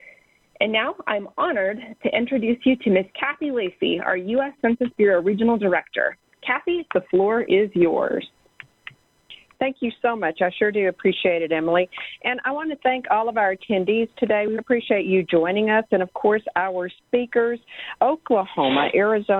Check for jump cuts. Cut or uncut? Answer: cut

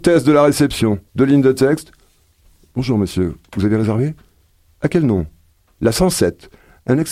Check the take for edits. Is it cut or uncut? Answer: cut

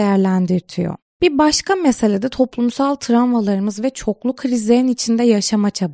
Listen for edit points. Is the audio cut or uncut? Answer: uncut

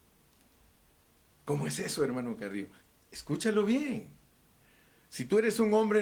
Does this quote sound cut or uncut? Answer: uncut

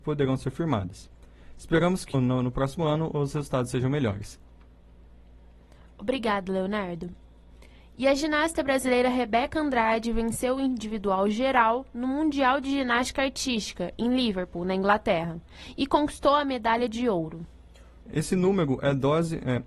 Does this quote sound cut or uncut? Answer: cut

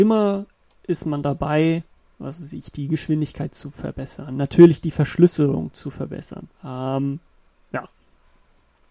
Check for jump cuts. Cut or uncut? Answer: cut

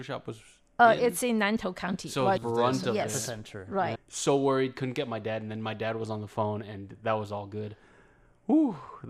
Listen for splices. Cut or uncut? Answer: cut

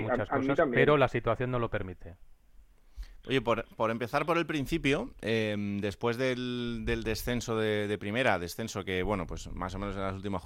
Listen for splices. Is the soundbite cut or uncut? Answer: cut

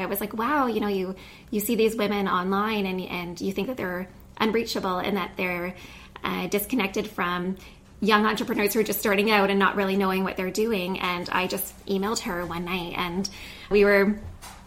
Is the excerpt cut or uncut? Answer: cut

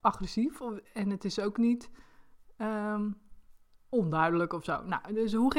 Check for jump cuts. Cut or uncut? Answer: uncut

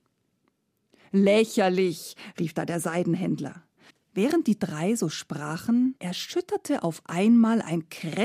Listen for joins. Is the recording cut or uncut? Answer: cut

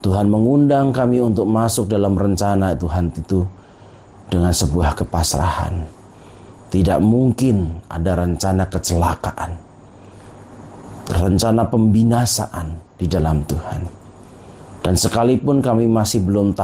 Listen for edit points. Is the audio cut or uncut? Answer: cut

